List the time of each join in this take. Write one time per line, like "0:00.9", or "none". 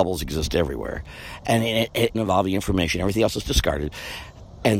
0:02.1